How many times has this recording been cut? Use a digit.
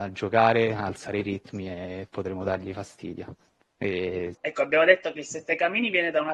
1